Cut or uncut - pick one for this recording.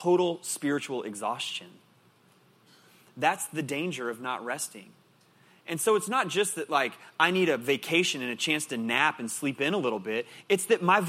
uncut